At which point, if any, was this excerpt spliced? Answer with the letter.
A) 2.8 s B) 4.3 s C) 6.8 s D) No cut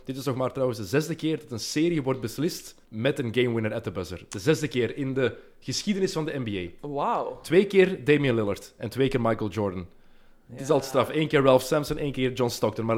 A